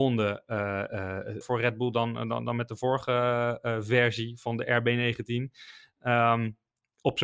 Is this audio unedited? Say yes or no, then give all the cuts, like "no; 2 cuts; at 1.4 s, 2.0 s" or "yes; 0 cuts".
no; 1 cut; at 1.4 s